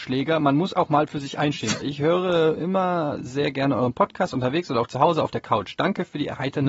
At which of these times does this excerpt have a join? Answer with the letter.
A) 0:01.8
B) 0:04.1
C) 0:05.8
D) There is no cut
A